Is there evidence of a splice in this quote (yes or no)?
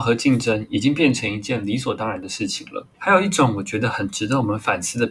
yes